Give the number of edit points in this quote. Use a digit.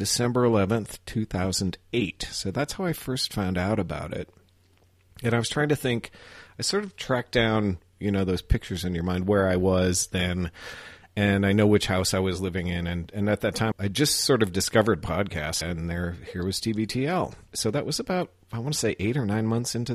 3